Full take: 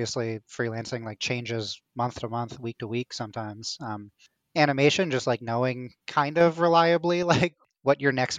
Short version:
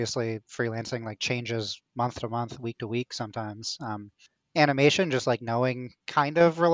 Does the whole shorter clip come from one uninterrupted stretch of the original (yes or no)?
yes